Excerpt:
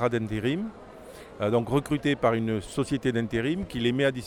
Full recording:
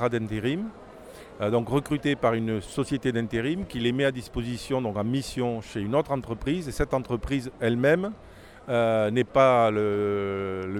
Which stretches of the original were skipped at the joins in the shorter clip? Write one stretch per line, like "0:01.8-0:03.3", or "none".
none

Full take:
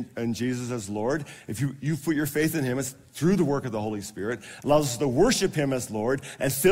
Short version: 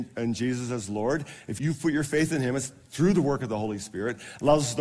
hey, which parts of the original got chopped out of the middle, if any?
0:01.6-0:01.8

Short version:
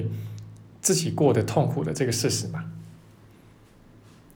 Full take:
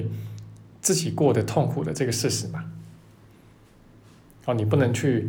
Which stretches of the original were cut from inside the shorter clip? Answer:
none

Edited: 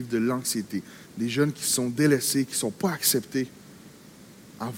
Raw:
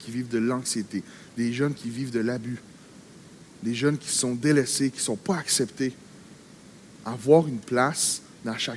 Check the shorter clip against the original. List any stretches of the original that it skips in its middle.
0:01.3-0:03.5

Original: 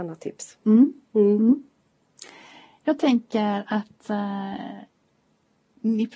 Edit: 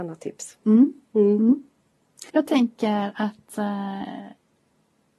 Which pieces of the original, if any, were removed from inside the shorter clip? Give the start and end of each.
0:02.3-0:02.8

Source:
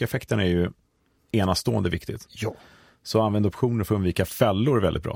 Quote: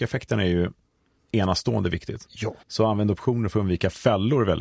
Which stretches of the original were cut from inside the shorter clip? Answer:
0:02.6-0:03.0

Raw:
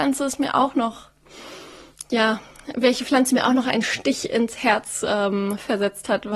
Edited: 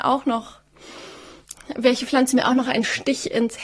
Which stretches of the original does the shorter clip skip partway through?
0:02.1-0:02.6

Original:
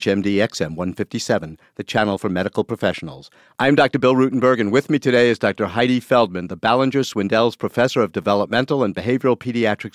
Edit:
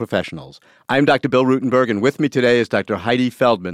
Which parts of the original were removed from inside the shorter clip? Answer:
none

